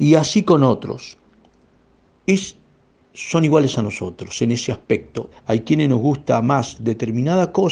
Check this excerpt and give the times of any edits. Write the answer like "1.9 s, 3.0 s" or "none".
2.9 s, 5.3 s